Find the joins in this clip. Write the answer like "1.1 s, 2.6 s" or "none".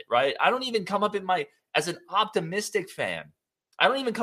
none